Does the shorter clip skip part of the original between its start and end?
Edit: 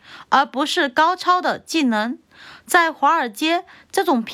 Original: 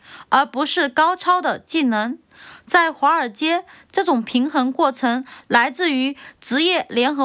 no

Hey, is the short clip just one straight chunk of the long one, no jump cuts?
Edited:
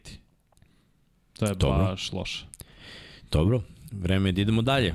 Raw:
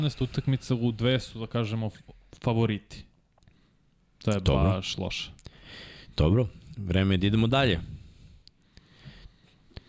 yes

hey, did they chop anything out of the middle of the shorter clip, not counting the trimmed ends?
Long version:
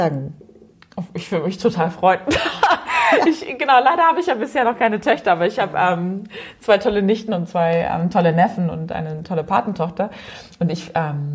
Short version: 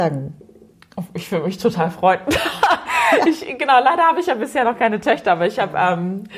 no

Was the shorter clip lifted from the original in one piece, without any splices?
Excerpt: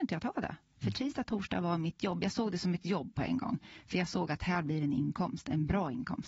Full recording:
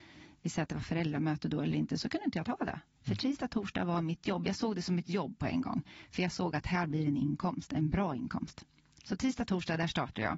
yes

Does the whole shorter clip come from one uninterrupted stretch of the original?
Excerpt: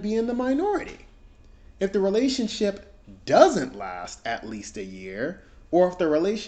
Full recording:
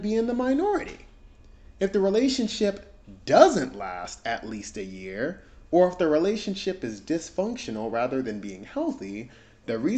yes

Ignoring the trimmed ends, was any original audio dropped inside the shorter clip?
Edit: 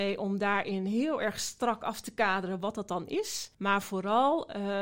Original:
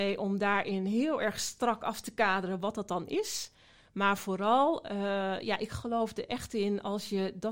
yes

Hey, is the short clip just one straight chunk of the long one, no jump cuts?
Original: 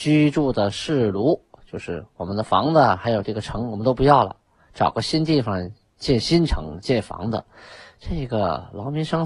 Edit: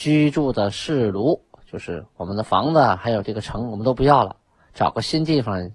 yes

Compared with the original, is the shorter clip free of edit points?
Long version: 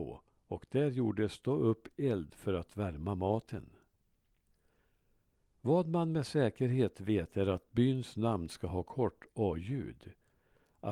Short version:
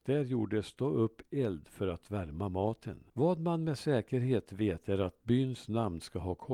no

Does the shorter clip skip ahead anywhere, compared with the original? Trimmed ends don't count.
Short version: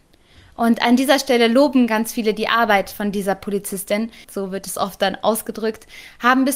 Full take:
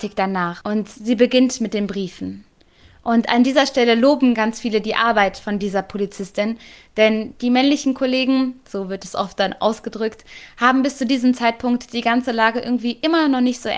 yes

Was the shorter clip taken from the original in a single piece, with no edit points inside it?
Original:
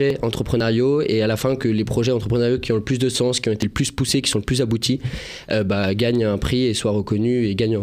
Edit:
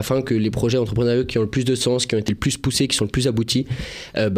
yes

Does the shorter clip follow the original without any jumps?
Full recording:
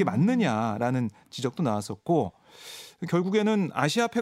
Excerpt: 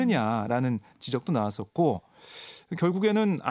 yes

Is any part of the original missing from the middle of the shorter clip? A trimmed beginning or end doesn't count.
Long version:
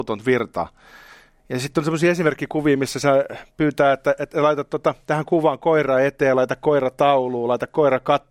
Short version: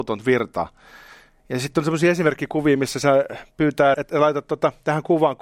yes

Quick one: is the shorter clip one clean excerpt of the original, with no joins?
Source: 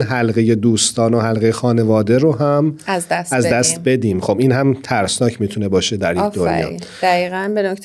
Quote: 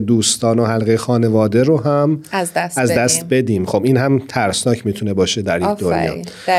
yes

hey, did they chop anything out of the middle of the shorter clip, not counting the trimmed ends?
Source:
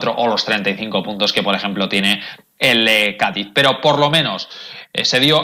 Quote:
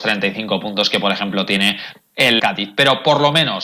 yes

